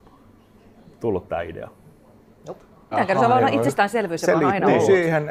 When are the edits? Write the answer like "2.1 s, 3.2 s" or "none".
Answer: 2.9 s

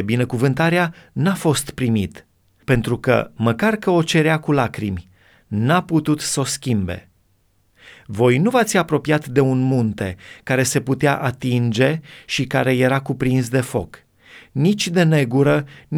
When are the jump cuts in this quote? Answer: none

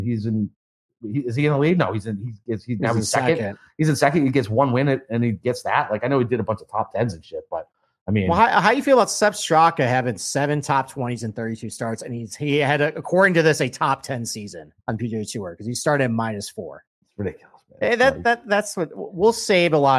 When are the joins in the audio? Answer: 14.8 s

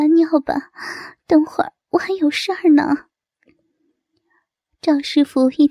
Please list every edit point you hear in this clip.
none

